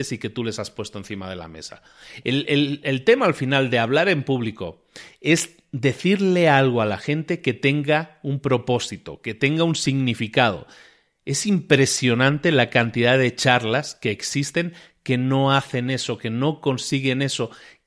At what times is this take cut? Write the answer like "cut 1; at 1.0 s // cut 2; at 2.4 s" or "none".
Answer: none